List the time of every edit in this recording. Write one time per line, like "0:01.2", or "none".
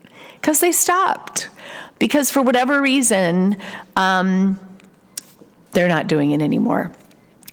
none

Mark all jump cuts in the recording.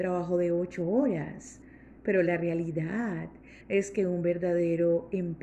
none

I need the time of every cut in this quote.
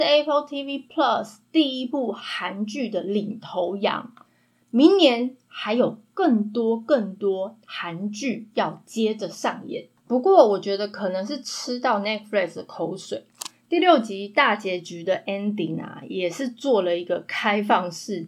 0:10.0

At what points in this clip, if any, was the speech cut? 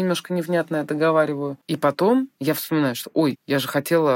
none

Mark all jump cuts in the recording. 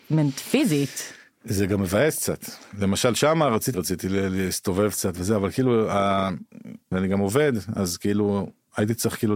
0:03.7
0:06.9

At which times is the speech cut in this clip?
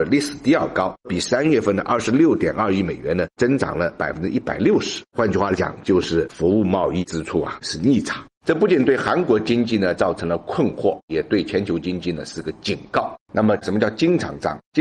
0:08.3

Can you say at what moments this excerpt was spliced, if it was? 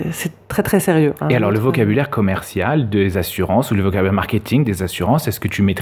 none

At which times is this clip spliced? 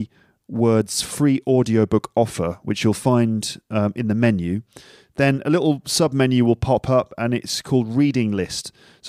none

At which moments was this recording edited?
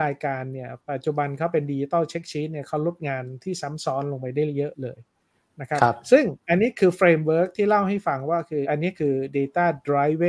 0:08.6

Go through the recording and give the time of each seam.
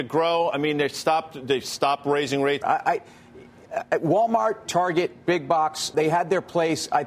0:02.6
0:05.9

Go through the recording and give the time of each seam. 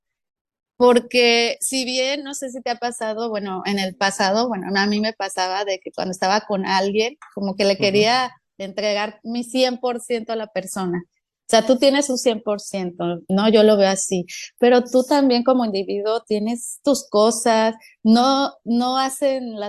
none

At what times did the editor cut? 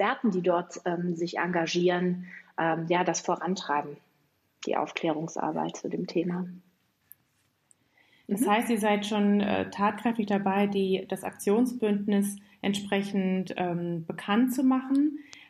none

